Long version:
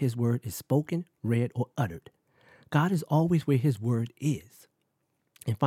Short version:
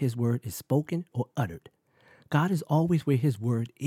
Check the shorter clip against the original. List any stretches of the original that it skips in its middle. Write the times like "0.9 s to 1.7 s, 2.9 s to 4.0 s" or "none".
1.1 s to 1.5 s

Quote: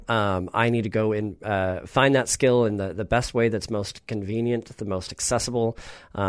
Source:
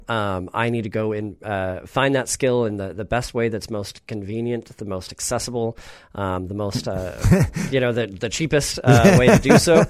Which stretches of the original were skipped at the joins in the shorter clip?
none

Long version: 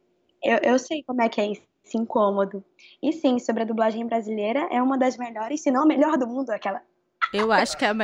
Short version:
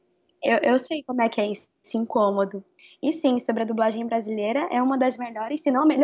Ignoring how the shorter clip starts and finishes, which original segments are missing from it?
none

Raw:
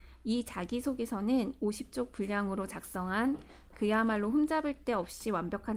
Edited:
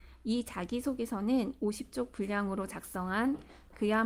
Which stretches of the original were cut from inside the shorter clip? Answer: none

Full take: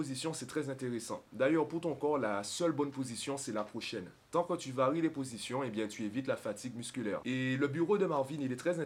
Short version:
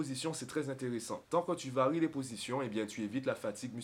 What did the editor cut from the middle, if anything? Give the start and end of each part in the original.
1.2 s to 4.3 s

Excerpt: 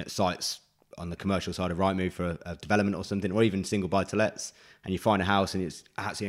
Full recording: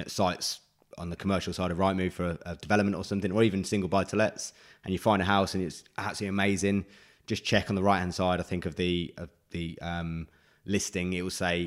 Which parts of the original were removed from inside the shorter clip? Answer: none

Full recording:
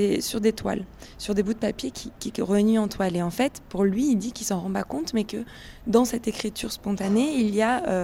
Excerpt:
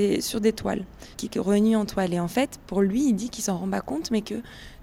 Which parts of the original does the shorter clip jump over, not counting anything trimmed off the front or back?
1.1 s to 2.2 s

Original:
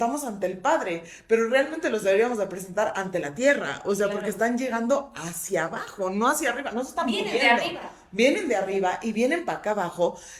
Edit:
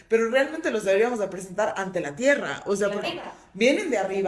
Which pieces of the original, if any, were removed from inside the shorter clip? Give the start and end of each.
4.2 s to 7.6 s

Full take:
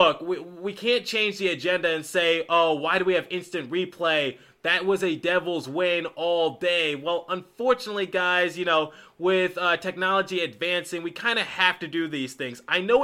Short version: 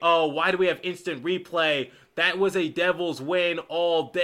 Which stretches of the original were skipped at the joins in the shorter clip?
none

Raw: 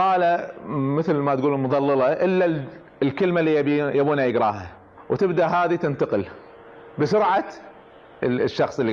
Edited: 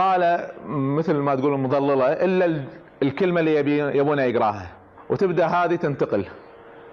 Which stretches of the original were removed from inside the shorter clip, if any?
none

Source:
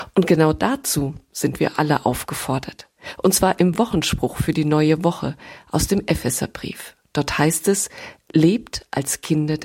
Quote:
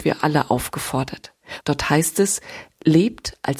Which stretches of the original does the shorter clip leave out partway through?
3.2 s to 7.1 s

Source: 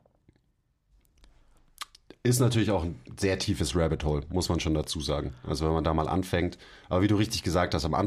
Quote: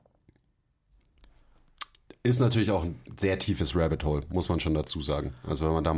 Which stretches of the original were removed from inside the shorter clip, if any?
none

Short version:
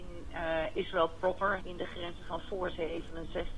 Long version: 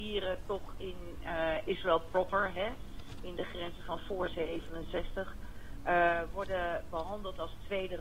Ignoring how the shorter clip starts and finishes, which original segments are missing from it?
2.5 s to 3.2 s

